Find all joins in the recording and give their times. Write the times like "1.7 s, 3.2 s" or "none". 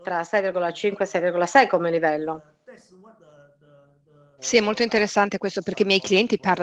4.4 s